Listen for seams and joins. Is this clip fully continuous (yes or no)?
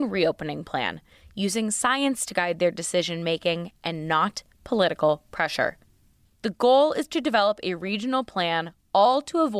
no